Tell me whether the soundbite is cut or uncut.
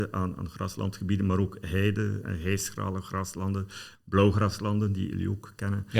cut